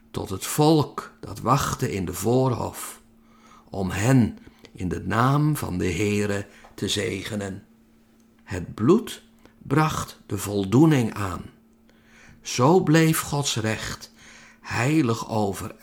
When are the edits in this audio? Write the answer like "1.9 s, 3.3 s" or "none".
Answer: 8.4 s